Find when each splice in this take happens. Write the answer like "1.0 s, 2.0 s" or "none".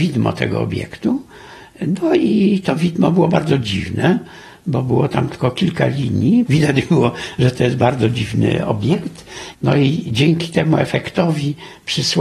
6.5 s, 9.5 s